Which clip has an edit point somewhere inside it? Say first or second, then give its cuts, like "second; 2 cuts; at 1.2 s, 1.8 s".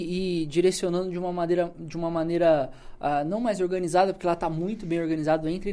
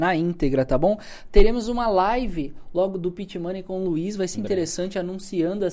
second; 1 cut; at 4.3 s